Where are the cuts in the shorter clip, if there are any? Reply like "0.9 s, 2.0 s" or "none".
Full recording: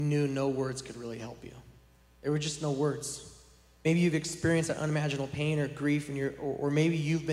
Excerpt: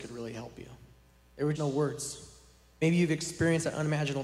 1.5 s